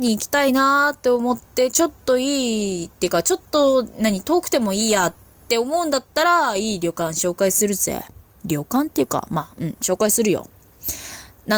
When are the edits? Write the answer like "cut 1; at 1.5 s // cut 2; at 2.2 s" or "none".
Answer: none